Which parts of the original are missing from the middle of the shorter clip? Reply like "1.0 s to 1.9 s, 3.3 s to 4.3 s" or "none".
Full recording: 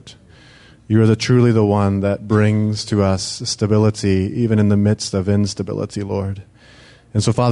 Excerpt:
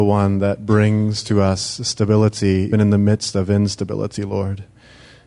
4.3 s to 4.5 s

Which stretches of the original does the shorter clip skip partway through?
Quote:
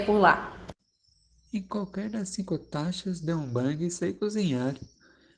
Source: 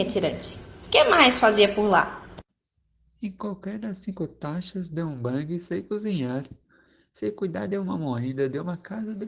none

